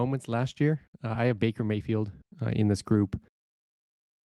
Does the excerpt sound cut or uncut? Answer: uncut